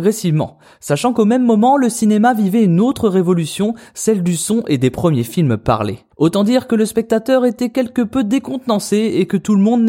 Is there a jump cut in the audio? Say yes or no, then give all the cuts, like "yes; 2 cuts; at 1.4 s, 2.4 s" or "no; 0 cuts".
no; 0 cuts